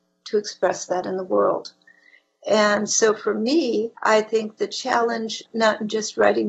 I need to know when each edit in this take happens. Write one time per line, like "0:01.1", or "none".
0:04.0
0:05.5